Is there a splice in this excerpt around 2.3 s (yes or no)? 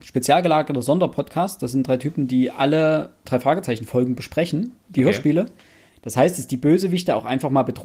no